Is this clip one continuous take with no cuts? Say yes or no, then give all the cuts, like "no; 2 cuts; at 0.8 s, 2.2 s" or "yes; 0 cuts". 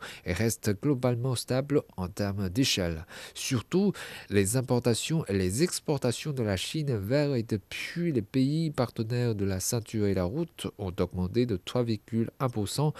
yes; 0 cuts